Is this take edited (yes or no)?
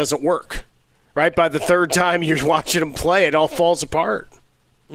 no